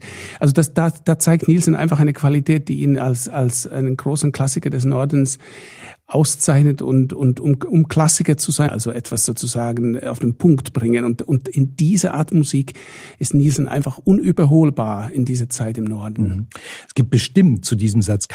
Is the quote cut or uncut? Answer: cut